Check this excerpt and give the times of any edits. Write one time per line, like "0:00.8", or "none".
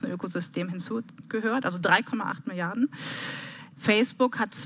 0:03.7